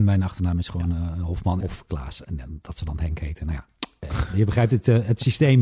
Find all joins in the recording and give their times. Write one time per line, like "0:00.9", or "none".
0:01.6

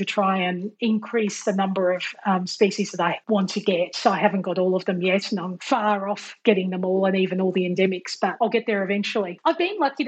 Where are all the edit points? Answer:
none

